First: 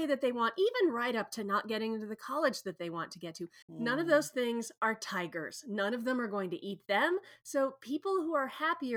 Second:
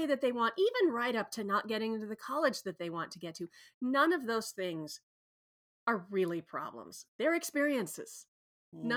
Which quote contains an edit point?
first; 2 cuts; at 3.6 s, 7.4 s

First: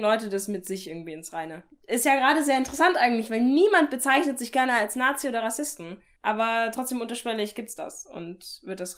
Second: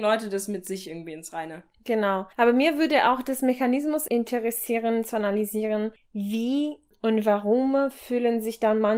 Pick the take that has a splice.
first; 1 cut; at 1.7 s

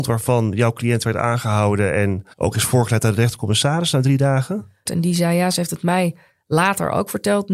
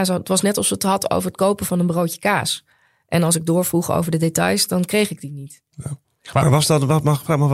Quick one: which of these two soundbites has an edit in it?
first; 2 cuts; at 2.3 s, 4.9 s

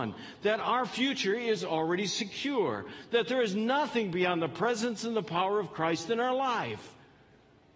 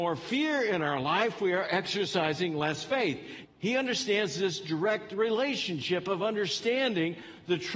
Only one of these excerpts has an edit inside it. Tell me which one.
second; 1 cut; at 3.4 s

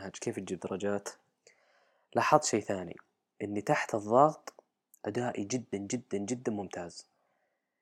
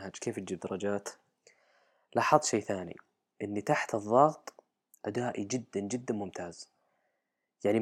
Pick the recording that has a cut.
second; 1 cut; at 5.7 s

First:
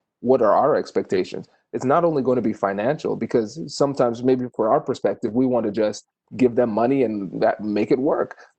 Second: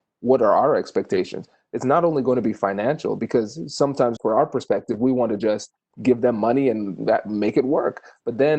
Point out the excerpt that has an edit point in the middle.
second; 1 cut; at 4.2 s

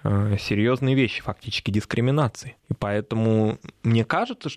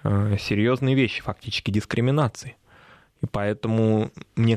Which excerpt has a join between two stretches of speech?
first; 1 cut; at 2.6 s

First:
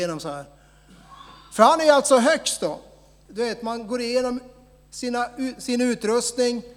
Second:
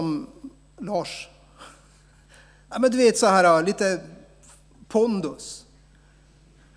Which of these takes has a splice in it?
first; 1 cut; at 3.3 s

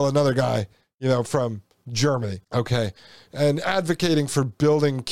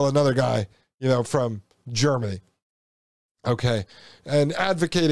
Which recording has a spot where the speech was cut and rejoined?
first; 1 cut; at 2.4 s

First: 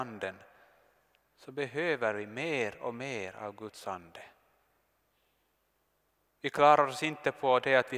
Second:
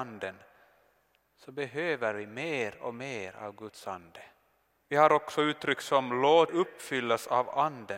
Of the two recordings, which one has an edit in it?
second; 2 cuts; at 4.8 s, 6.5 s

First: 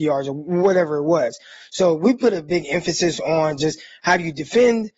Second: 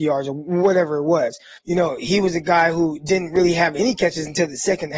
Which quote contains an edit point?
second; 1 cut; at 1.6 s

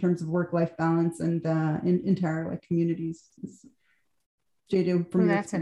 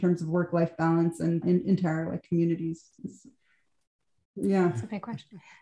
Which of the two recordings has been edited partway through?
second; 2 cuts; at 1.4 s, 4.2 s

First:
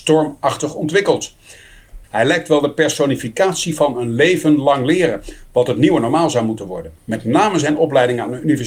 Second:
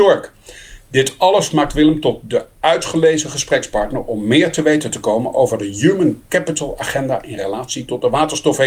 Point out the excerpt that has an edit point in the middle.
first; 2 cuts; at 2.0 s, 7.0 s

